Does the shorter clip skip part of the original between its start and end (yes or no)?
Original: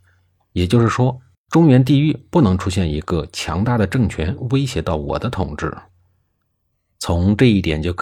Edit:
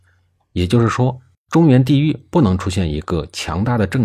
no